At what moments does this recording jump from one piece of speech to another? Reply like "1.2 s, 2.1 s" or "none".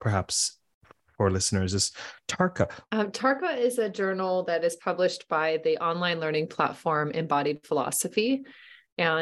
2.9 s